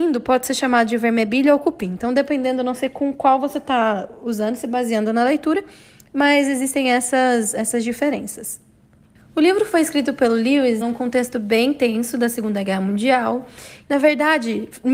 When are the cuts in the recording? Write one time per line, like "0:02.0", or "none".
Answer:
0:10.8
0:13.8